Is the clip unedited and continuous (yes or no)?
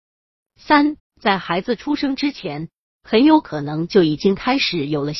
no